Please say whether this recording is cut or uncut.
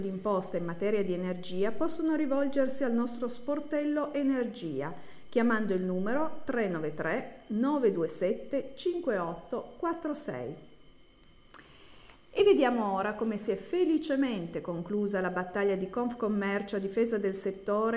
uncut